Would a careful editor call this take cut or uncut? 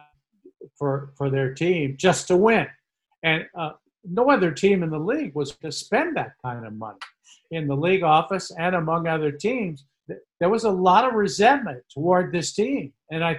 cut